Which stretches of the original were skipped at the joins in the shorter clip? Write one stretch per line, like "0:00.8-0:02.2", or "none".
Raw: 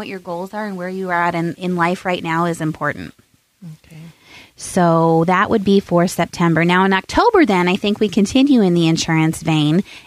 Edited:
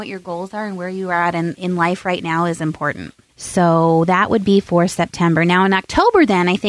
0:03.3-0:04.5